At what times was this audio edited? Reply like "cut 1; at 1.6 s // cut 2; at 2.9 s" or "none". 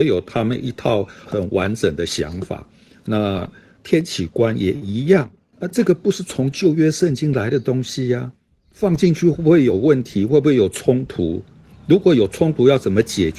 cut 1; at 1.3 s // cut 2; at 5.5 s

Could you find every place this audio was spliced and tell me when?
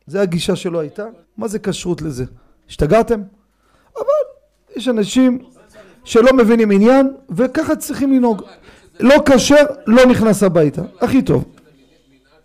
cut 1; at 1.2 s

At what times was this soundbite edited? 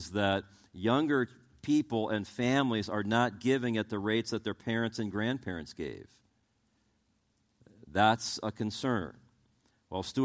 none

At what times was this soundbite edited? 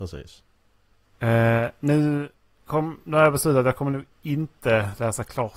none

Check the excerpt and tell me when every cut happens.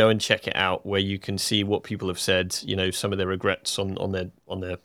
none

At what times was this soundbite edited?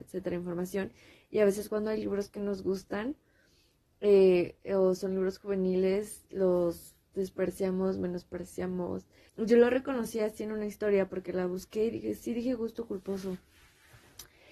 cut 1; at 9.3 s

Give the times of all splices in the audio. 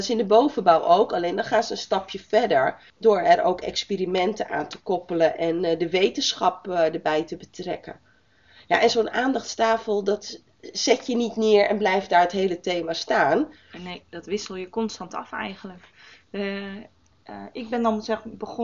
cut 1; at 2.9 s

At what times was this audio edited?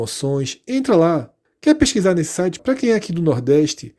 cut 1; at 1.4 s // cut 2; at 2.6 s

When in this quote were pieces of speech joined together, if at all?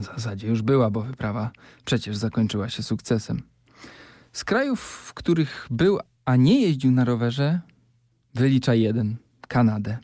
none

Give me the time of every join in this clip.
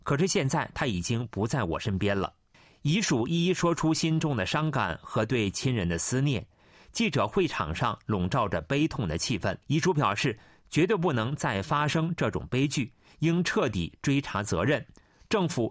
cut 1; at 9.6 s

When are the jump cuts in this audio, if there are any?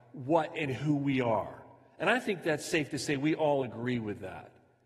none

